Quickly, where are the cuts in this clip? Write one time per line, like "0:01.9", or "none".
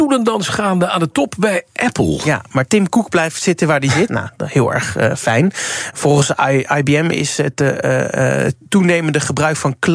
0:04.1